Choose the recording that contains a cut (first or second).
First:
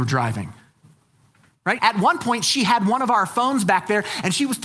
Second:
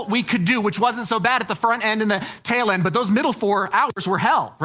first